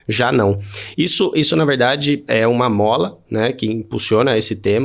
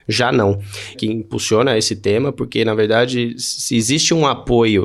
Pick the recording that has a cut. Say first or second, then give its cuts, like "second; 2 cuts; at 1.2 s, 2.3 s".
second; 1 cut; at 0.9 s